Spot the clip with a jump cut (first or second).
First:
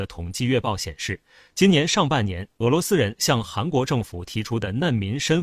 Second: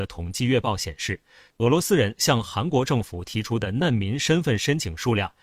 second